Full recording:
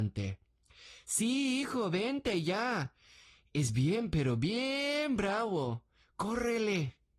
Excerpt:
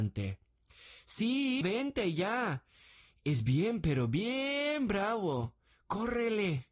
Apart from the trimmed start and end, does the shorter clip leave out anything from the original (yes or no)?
yes